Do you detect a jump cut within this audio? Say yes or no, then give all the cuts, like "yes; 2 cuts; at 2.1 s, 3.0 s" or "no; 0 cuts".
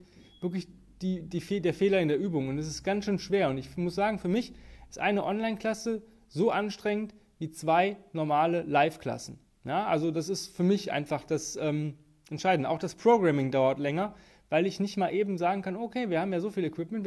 no; 0 cuts